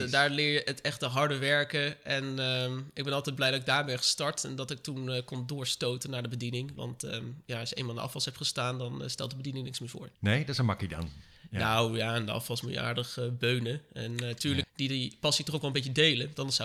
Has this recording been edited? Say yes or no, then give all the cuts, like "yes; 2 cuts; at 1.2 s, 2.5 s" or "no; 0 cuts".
yes; 2 cuts; at 10.1 s, 14.6 s